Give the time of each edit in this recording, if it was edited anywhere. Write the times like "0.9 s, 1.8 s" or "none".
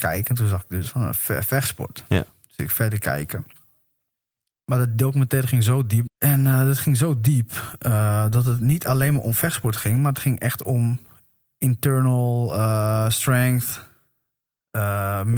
6.1 s